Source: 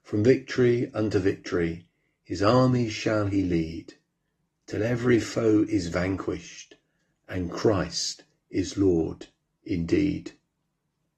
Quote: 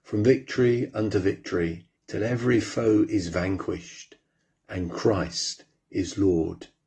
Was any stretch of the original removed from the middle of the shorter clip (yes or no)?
yes